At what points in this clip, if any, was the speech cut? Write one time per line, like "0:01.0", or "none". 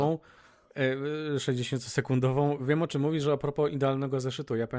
none